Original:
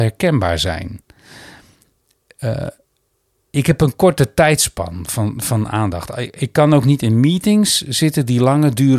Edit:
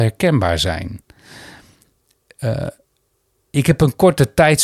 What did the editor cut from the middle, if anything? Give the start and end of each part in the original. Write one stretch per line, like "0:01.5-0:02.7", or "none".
none

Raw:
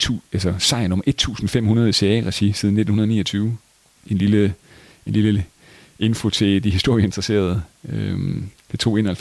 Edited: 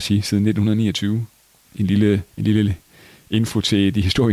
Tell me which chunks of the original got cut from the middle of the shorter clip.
0:04.6-0:05.0

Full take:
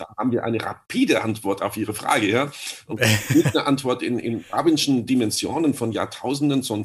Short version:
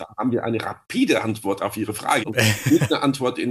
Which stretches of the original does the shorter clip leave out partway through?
0:02.2-0:02.8

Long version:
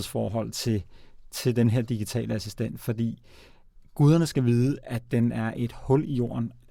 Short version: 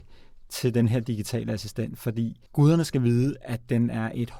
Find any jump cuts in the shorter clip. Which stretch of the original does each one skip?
0:03.3-0:03.9

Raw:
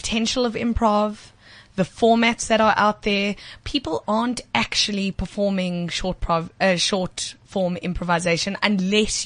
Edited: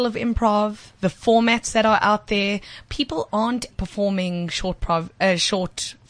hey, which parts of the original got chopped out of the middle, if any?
0:01.4-0:01.7
0:04.5-0:05.1

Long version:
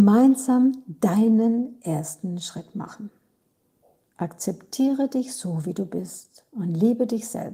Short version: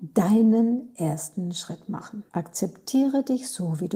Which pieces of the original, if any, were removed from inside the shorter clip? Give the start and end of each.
0:03.1-0:04.1

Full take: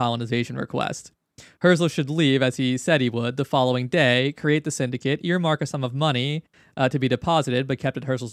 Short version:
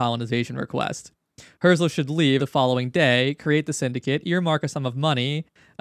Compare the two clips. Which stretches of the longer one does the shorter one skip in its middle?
0:02.4-0:03.4

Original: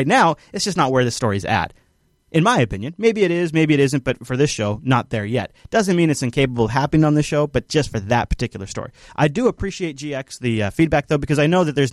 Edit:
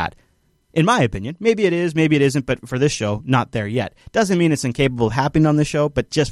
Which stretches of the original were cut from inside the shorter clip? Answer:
none

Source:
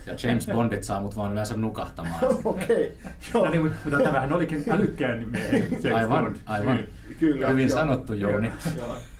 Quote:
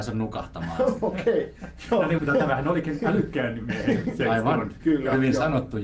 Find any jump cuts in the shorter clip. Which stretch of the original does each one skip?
0:03.6-0:03.8
0:06.4-0:07.2

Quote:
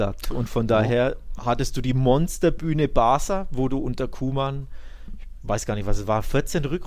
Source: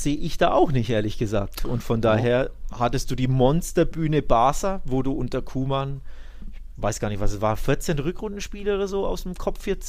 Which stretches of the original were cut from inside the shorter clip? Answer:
none

